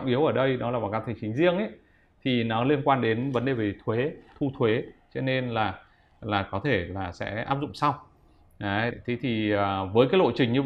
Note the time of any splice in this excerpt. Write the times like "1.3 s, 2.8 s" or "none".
8.9 s